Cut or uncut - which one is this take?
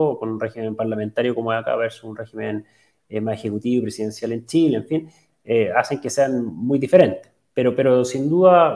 uncut